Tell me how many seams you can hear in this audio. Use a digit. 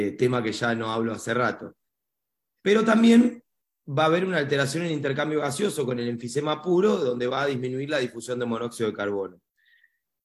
0